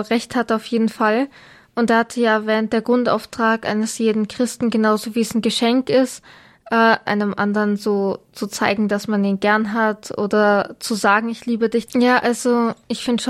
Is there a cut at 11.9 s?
yes; 2 cuts; at 7.1 s, 11.9 s

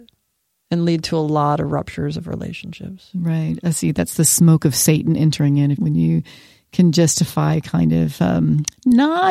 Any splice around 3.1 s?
no; 1 cut; at 5.7 s

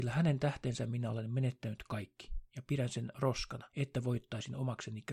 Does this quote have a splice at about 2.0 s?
no; 1 cut; at 3.7 s

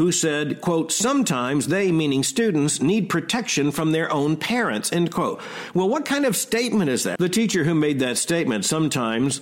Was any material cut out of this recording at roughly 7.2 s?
yes; 1 cut; at 7.2 s

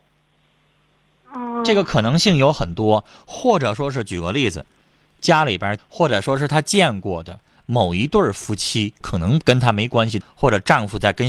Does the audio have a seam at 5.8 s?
yes; 3 cuts; at 5.8 s, 9.0 s, 10.2 s

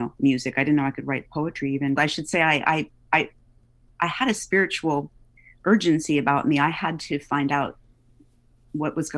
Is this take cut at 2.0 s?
yes; 1 cut; at 2.0 s

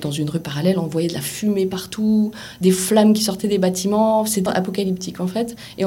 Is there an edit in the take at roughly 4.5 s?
yes; 1 cut; at 4.5 s

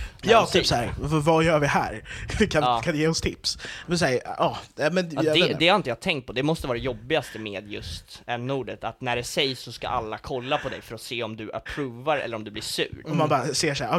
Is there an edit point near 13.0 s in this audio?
yes; 1 cut; at 13.0 s

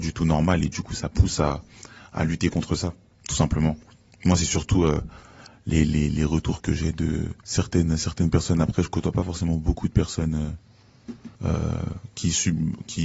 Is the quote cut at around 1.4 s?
no; 2 cuts; at 7.4 s, 11.3 s

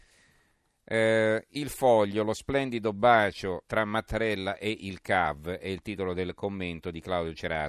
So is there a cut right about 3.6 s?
yes; 1 cut; at 3.6 s

